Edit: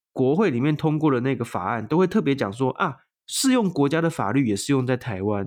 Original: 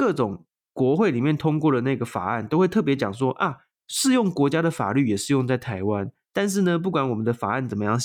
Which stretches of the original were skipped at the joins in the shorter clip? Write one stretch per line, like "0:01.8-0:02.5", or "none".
none